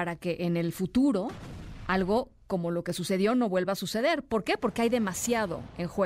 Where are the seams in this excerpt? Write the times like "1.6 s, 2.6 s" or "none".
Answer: none